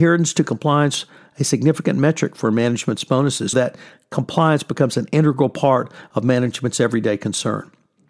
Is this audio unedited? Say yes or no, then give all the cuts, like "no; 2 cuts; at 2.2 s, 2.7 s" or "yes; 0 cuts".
no; 1 cut; at 3.5 s